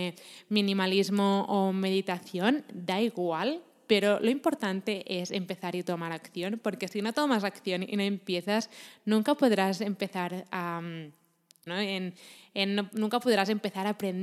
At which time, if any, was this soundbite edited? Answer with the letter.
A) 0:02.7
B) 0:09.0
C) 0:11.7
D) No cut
C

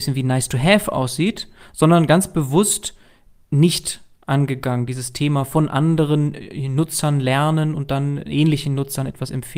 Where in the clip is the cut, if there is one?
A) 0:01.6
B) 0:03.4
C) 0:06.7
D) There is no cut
D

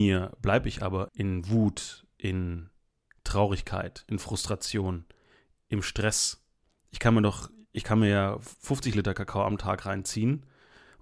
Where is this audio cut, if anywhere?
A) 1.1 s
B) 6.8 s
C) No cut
A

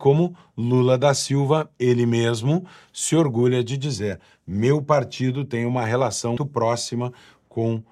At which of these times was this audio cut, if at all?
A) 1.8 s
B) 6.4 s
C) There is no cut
B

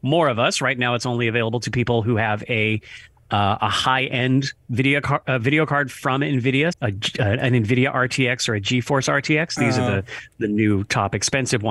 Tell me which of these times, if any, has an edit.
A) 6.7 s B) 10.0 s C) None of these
A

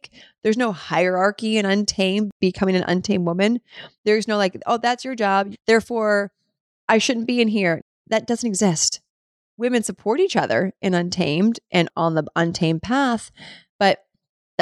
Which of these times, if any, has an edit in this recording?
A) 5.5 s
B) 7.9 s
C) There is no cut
A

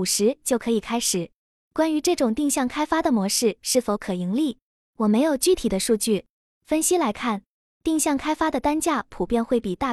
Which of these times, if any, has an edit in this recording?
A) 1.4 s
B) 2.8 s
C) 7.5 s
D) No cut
D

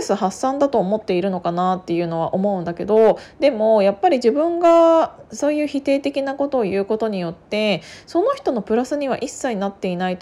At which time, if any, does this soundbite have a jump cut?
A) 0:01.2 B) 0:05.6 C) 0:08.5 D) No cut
D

